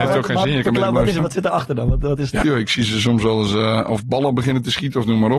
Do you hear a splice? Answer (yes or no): yes